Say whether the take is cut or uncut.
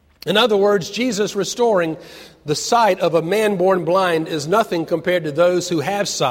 uncut